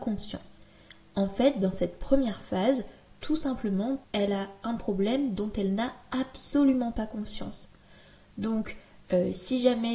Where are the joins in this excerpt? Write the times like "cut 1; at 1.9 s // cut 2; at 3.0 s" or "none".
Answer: cut 1; at 4.0 s